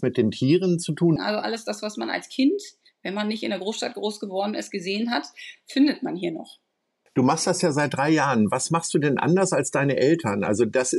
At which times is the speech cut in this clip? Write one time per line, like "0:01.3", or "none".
0:01.2